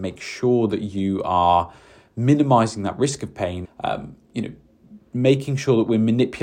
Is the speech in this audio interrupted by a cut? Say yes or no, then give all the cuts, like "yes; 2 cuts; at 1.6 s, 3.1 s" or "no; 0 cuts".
yes; 1 cut; at 3.7 s